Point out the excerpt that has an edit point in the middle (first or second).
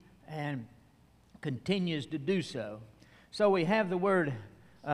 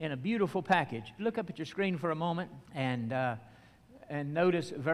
second